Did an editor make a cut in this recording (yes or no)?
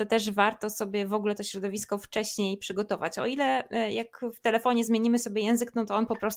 no